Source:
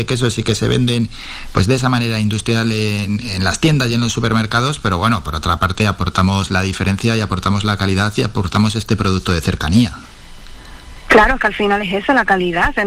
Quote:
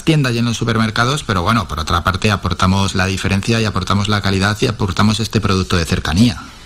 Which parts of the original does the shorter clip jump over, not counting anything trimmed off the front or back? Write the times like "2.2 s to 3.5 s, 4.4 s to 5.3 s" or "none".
none